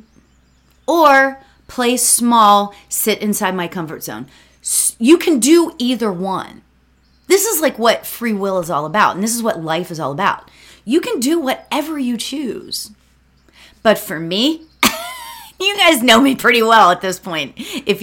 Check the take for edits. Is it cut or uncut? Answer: uncut